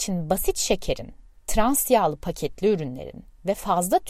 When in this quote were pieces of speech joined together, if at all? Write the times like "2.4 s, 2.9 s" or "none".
none